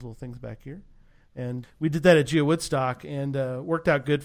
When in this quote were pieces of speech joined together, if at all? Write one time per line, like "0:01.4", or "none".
0:01.6